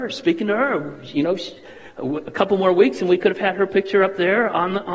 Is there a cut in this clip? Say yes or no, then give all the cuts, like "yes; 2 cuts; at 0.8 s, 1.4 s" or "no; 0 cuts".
no; 0 cuts